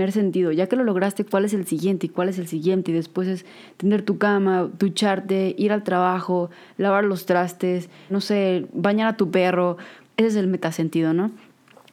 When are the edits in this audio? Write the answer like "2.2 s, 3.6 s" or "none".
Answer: 8.1 s, 10.1 s